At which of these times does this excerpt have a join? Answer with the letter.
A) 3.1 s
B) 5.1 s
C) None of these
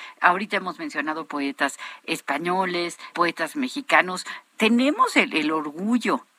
A